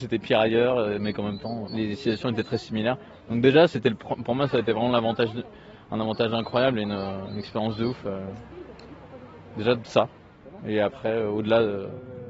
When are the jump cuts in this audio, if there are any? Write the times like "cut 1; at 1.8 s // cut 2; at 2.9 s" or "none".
none